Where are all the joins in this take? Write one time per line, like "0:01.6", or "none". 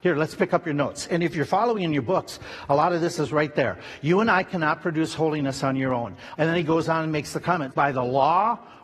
0:06.4
0:07.7